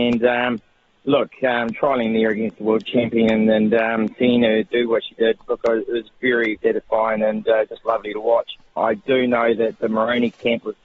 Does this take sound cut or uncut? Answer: cut